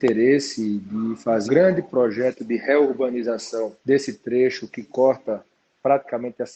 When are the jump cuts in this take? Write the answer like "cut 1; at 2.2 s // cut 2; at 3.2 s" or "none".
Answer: cut 1; at 1.4 s // cut 2; at 3.8 s

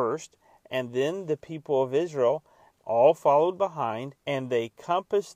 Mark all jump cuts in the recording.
cut 1; at 4.2 s

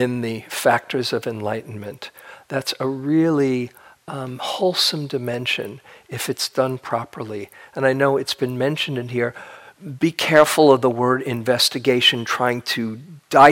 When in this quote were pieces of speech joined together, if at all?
none

